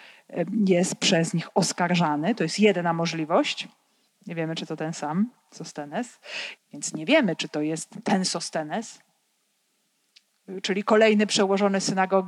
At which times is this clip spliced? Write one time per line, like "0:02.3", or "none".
0:04.1
0:06.6